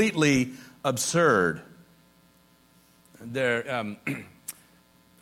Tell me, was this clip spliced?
yes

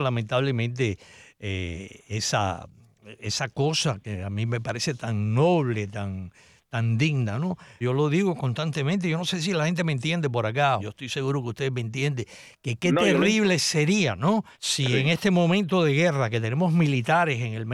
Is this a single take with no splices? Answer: no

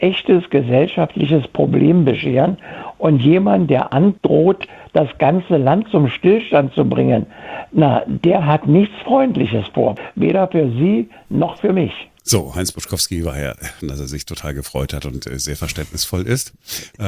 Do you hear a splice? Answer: yes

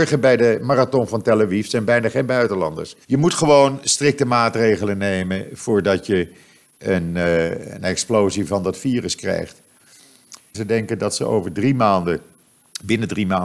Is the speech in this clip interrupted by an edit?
yes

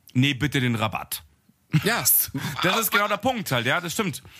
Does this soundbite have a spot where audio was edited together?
no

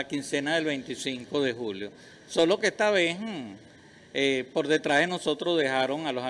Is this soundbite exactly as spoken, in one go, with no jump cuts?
yes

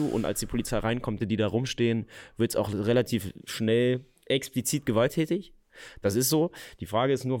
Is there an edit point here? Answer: yes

